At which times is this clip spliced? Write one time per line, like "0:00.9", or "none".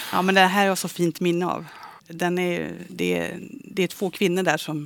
0:02.0